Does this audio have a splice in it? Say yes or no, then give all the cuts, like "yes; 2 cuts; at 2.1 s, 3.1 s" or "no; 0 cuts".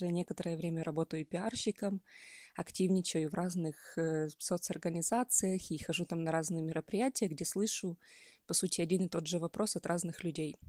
no; 0 cuts